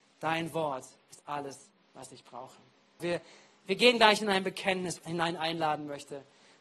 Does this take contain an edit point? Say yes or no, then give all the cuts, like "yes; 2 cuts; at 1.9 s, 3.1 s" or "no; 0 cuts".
yes; 2 cuts; at 3.0 s, 5.0 s